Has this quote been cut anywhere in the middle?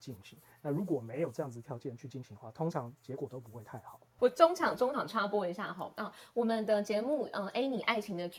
no; 0 cuts

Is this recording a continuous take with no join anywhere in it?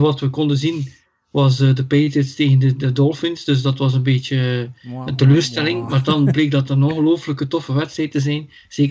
yes; 0 cuts

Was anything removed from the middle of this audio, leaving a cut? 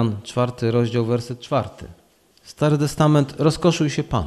no; 0 cuts

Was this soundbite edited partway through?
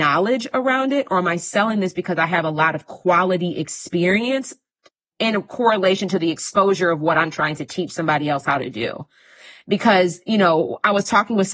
no; 0 cuts

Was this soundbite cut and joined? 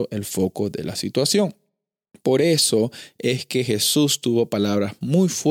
no; 0 cuts

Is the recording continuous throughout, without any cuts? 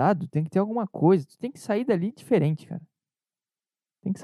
yes; 0 cuts

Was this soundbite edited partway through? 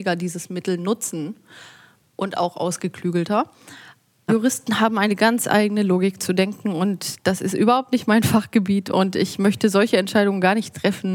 yes; 1 cut; at 4.3 s

